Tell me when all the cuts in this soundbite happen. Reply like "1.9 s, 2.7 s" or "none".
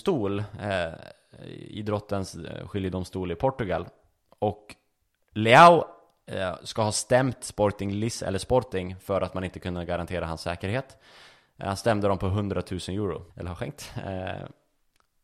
13.3 s